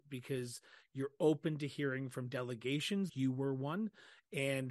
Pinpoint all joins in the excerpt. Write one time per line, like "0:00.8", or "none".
0:03.1

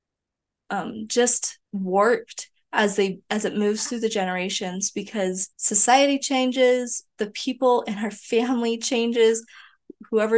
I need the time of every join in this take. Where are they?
0:01.7
0:05.5

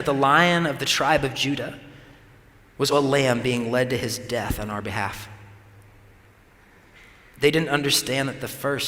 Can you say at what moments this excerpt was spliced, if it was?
0:02.9

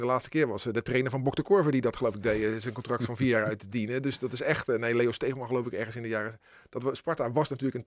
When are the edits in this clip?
none

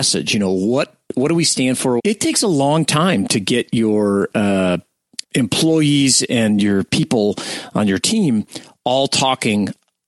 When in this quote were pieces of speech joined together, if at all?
0:02.0
0:05.2

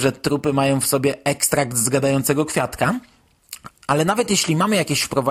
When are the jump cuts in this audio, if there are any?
0:03.7

